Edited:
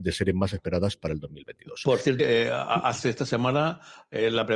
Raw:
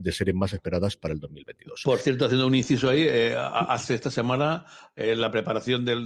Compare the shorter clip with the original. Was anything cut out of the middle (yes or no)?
yes